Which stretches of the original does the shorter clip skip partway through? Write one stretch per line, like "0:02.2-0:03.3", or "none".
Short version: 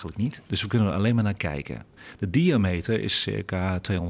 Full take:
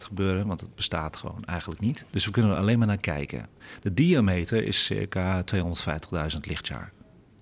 none